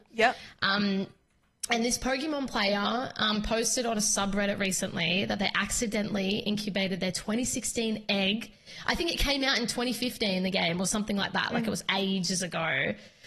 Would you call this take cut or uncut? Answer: uncut